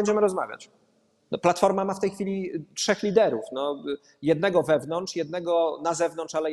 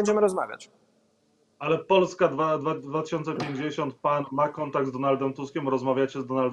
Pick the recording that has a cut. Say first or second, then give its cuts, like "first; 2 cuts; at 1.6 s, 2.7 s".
first; 1 cut; at 1.3 s